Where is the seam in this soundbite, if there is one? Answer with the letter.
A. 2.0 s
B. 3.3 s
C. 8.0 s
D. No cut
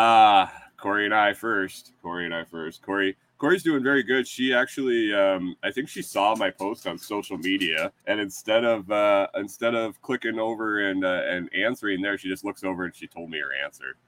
C